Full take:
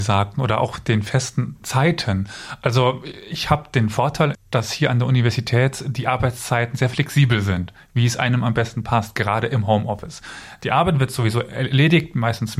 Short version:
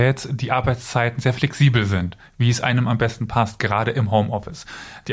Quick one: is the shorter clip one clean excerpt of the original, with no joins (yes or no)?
yes